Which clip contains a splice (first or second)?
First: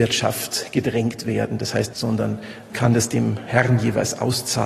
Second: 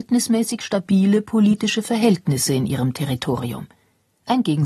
first